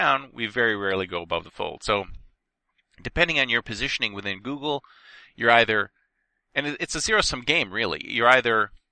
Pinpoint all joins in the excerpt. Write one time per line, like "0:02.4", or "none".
none